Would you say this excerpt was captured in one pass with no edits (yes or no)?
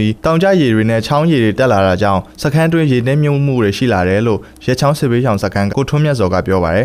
no